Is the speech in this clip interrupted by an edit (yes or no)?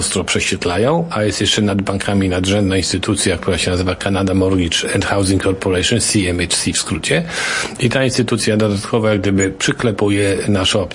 no